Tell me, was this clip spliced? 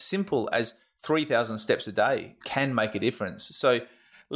no; 0 cuts

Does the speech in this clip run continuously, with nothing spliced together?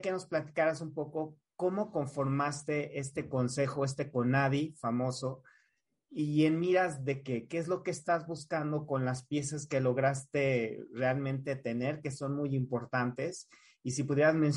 yes; 0 cuts

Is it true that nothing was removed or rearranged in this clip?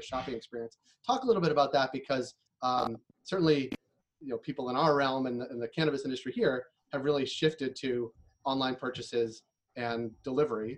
yes; 0 cuts

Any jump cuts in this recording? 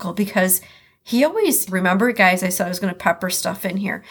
yes; 1 cut; at 1.7 s

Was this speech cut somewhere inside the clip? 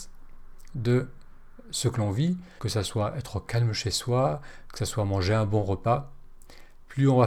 yes; 1 cut; at 2.6 s

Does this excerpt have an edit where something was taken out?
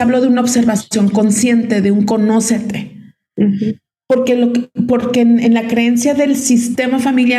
no; 0 cuts

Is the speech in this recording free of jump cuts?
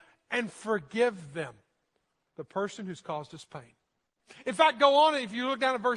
yes; 0 cuts

